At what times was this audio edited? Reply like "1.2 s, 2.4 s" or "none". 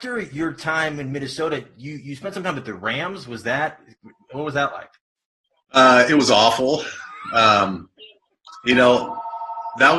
none